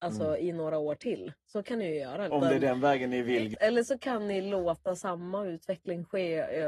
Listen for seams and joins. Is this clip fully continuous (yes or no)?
no